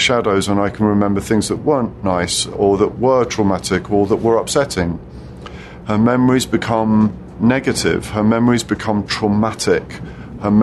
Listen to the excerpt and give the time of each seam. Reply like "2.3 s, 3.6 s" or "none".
5.8 s